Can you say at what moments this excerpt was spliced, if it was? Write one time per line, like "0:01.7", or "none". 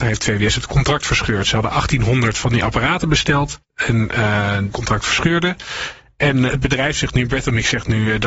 0:03.6
0:04.7
0:06.5